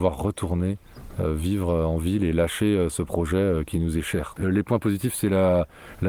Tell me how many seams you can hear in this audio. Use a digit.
1